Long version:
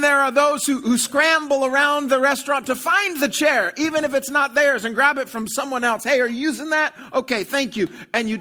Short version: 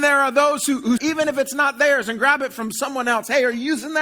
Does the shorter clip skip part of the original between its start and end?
yes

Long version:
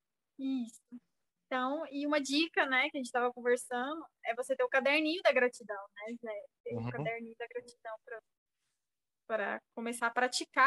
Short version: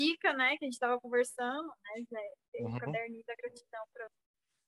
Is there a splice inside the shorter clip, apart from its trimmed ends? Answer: yes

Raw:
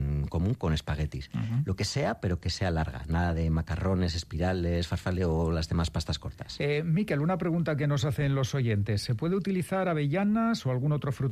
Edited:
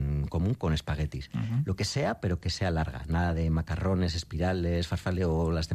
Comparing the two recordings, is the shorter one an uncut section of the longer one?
yes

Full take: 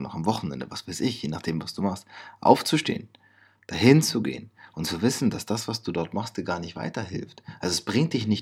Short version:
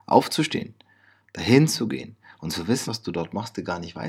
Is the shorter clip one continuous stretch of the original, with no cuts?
no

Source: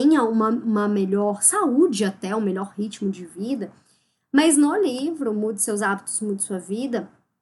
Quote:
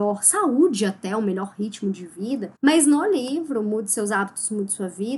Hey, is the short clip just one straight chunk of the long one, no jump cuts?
no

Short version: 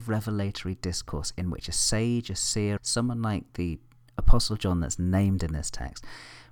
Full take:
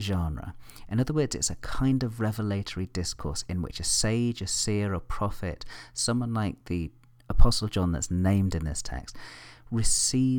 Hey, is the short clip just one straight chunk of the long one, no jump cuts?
no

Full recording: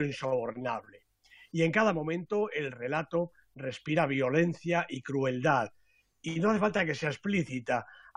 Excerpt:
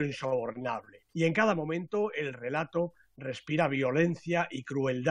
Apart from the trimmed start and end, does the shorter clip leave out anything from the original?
yes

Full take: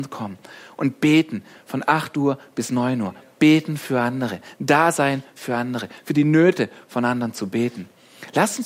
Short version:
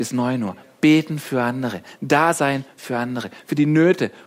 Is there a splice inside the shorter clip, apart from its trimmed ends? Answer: no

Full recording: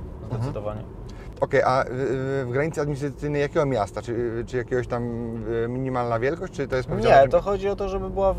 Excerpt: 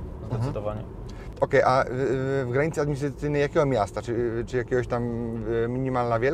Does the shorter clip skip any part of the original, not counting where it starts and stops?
no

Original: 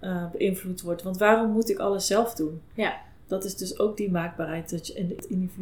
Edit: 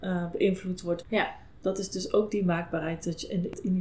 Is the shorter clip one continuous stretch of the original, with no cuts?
no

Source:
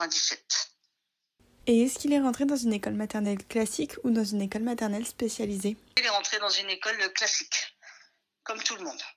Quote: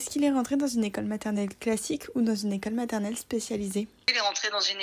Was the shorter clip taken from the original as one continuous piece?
yes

